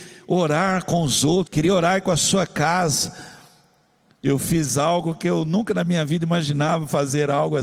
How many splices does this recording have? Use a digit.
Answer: 1